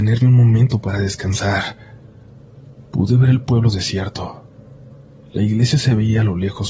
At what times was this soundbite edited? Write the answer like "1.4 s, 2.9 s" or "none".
none